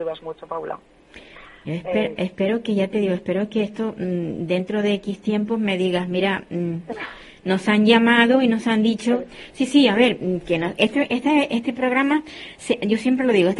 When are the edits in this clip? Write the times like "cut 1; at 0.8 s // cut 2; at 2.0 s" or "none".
none